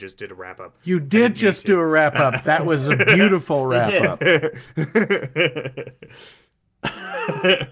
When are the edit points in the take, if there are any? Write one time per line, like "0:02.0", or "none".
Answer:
none

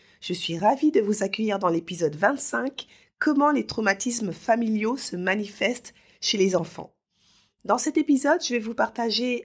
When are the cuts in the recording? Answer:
none

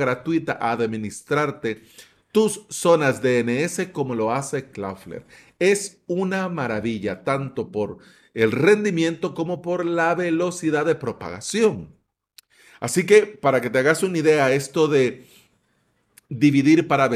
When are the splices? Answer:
none

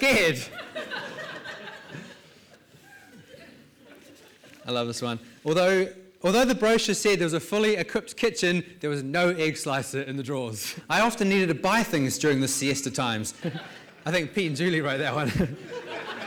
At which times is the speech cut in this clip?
0:10.8
0:13.4

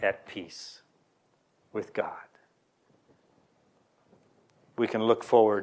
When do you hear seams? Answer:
none

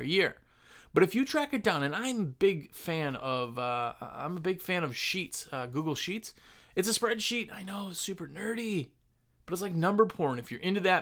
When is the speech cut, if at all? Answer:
none

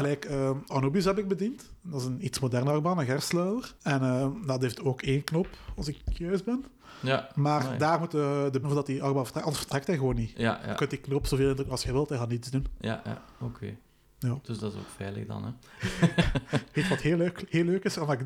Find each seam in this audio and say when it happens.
0:03.8
0:08.6

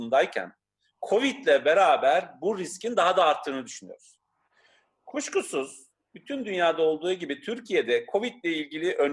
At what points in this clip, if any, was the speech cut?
none

